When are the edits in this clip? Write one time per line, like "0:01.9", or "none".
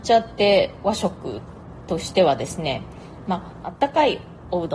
0:03.6